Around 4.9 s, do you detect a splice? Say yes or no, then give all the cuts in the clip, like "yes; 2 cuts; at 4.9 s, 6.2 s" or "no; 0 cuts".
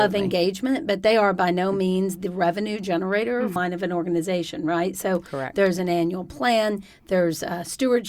no; 1 cut; at 3.6 s